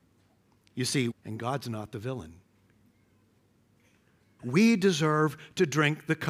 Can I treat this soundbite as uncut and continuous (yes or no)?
no